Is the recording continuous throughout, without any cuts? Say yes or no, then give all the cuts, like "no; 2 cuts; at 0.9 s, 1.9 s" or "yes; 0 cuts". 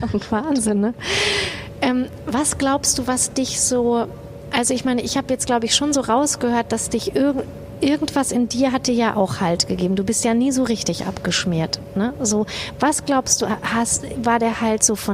yes; 0 cuts